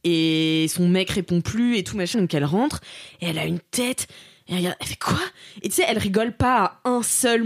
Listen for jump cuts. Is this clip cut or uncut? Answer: cut